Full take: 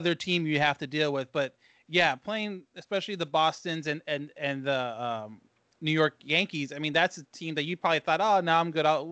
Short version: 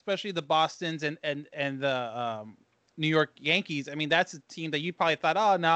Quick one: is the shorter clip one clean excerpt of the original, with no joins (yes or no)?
yes